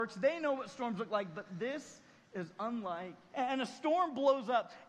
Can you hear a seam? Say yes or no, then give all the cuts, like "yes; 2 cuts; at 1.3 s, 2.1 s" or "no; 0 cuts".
yes; 1 cut; at 3.3 s